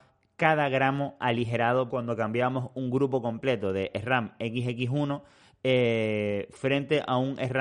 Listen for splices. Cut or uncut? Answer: cut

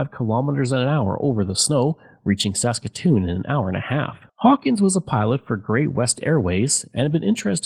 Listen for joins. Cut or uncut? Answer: cut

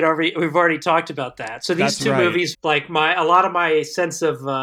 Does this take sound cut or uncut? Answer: cut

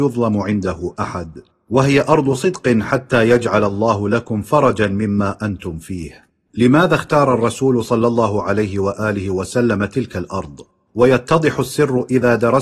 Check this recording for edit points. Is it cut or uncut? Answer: uncut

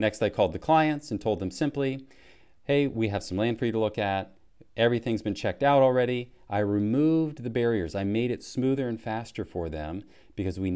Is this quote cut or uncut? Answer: uncut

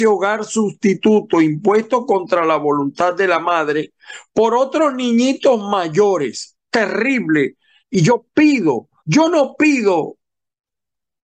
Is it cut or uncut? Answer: cut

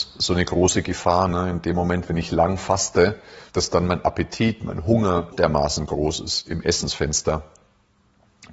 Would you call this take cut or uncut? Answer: cut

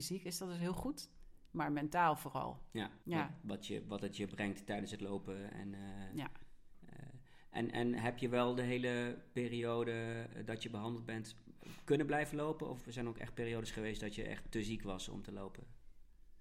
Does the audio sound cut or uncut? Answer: cut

